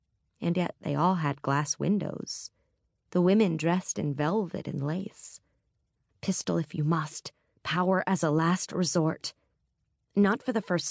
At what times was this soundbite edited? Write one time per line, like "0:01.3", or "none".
0:06.1